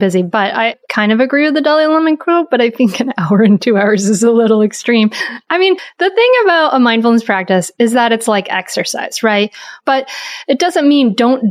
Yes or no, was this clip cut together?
yes